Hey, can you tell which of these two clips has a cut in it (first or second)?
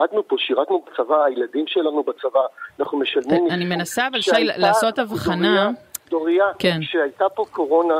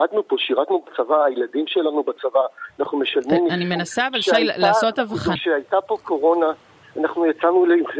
second